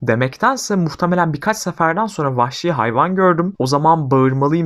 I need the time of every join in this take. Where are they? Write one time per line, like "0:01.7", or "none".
none